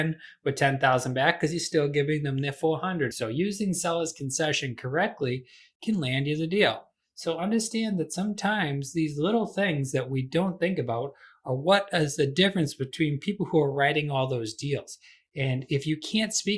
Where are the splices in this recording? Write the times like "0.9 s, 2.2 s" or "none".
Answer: 3.1 s